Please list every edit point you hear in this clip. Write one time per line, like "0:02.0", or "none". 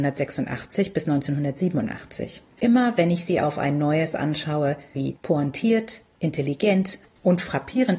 0:02.6
0:04.9